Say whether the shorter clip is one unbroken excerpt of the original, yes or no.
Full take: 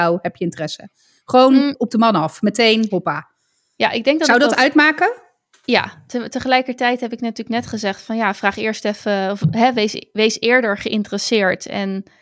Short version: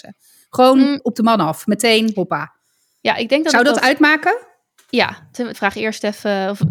no